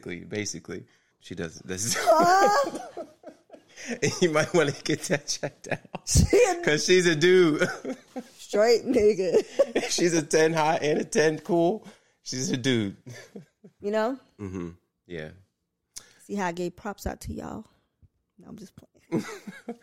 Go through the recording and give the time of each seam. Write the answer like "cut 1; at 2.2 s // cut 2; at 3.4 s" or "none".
cut 1; at 1.1 s // cut 2; at 13.8 s